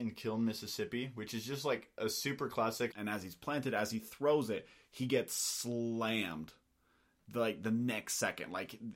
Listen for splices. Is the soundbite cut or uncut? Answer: cut